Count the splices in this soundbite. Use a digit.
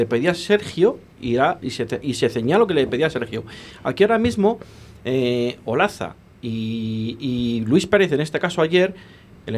0